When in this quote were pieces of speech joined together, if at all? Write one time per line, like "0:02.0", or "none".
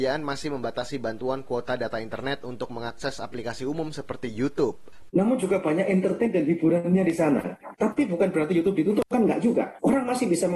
0:05.1
0:07.7